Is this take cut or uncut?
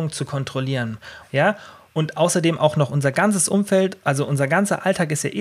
cut